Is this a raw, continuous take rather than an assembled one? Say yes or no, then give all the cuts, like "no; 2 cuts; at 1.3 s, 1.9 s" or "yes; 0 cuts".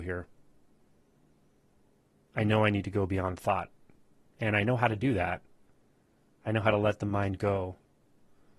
yes; 0 cuts